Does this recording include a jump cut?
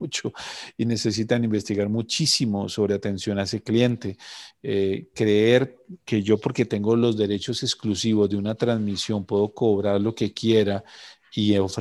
no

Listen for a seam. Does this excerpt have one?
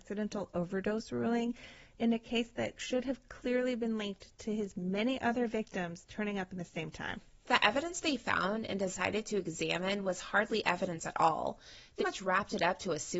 yes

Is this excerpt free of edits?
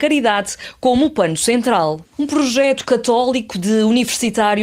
no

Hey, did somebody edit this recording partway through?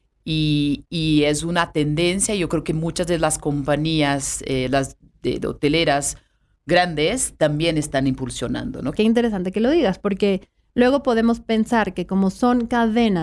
yes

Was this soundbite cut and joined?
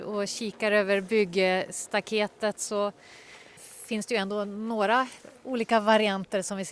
yes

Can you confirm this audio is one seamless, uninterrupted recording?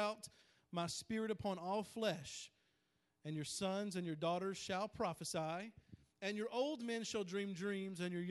yes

